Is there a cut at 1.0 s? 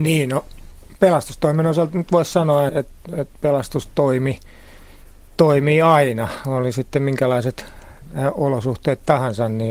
no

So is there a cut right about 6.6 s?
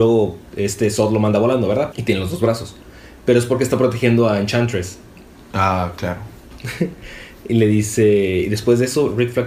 no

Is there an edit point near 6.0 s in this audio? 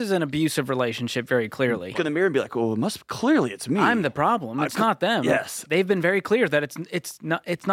no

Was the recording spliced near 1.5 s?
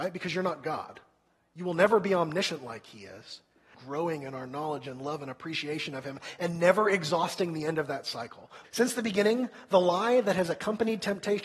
no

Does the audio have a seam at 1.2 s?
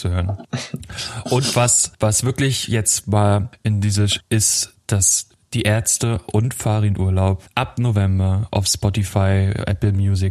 no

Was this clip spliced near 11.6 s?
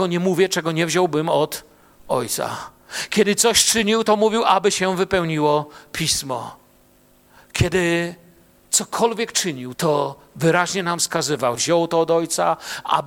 yes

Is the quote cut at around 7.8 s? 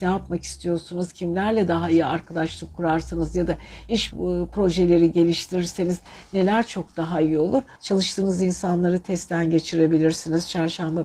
yes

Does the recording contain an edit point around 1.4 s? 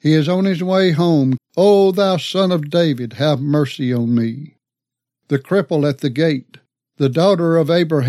yes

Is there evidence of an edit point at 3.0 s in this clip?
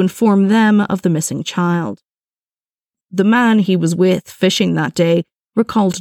yes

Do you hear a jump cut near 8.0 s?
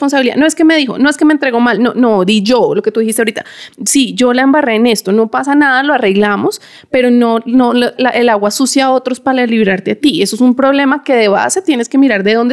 yes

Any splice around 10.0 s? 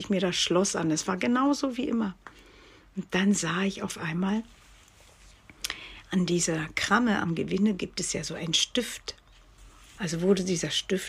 yes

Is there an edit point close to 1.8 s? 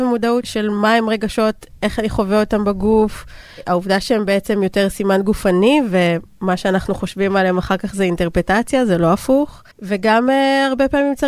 no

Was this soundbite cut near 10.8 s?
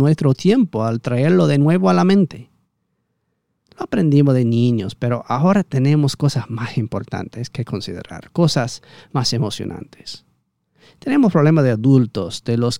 no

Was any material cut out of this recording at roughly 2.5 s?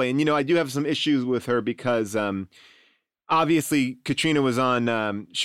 no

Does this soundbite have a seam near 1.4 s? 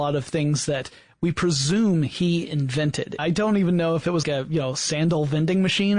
no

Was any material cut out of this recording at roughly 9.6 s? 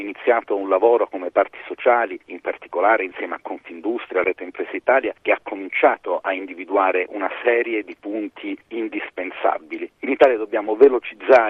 no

